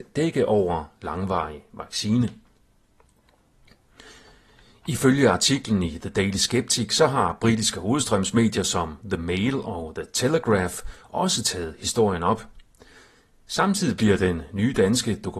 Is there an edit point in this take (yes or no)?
no